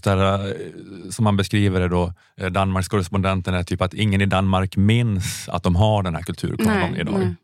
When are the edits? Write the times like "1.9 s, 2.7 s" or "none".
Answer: none